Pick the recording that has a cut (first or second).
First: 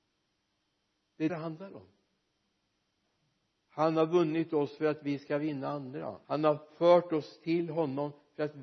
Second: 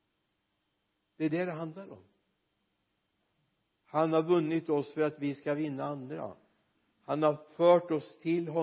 first